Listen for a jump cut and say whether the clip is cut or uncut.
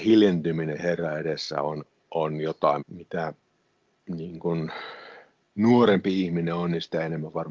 cut